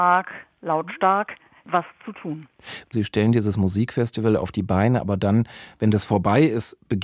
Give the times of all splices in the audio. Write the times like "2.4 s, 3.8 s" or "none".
2.9 s